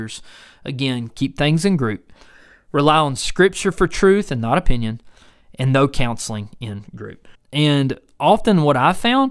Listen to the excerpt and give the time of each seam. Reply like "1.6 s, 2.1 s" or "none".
1.1 s, 7.3 s